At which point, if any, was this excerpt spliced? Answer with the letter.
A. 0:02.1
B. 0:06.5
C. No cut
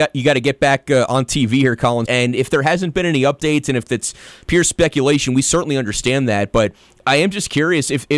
A